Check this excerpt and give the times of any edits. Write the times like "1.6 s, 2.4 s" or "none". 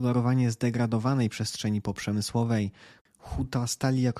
3.0 s